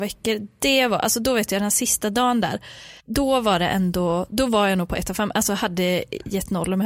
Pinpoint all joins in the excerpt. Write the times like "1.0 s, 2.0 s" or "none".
3.0 s